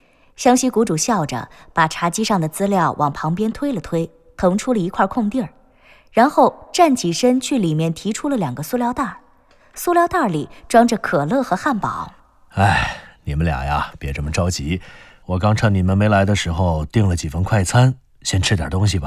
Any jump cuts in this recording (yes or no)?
yes